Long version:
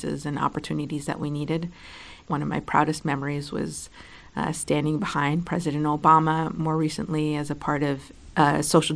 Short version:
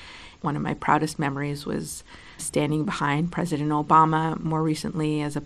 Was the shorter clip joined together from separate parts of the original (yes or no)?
yes